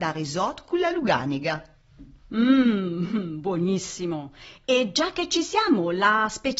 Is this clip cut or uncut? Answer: uncut